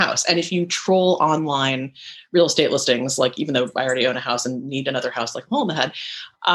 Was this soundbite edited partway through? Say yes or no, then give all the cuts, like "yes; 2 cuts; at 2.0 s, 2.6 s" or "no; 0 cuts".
no; 0 cuts